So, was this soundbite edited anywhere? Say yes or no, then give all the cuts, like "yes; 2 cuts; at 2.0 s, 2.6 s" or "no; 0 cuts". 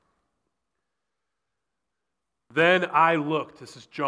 no; 0 cuts